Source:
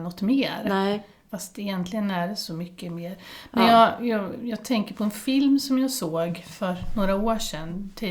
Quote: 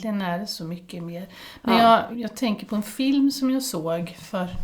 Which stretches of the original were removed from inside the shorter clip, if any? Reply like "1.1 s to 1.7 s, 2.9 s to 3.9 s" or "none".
4.0 s to 4.4 s